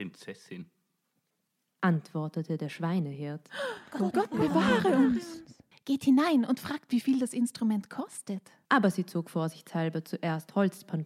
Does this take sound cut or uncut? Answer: cut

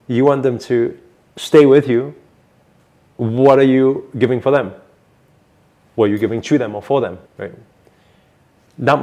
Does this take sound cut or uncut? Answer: cut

